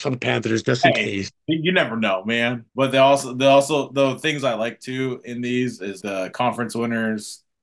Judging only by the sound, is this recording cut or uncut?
cut